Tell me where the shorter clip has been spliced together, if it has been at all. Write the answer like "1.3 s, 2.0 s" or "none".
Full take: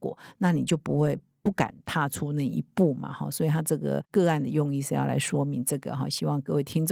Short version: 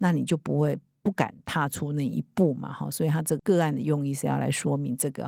3.4 s